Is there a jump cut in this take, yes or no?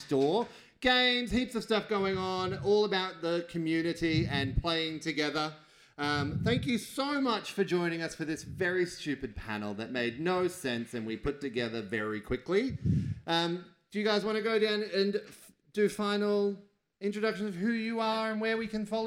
no